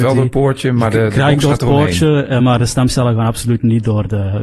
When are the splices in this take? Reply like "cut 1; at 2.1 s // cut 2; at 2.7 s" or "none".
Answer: none